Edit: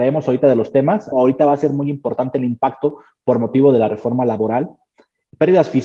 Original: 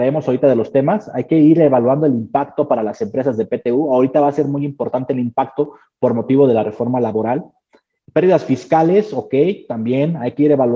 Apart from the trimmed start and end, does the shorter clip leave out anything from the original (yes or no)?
yes